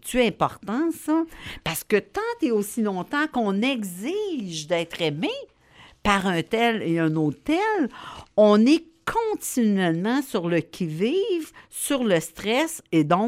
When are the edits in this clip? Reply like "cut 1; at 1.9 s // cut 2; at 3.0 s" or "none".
none